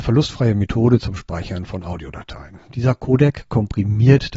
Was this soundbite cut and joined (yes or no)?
no